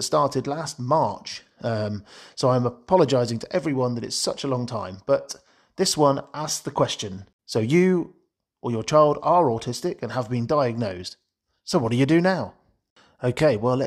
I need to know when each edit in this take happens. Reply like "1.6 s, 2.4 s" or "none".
none